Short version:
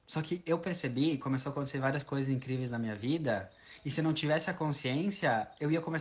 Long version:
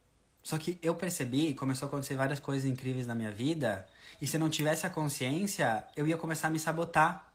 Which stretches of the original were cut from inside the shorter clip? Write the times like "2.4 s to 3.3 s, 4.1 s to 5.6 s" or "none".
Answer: none